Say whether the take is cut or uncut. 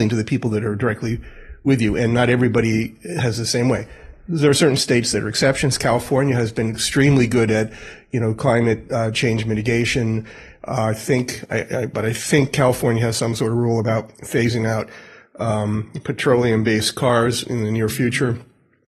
cut